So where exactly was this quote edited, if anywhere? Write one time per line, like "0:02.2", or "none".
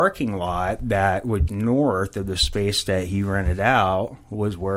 0:01.5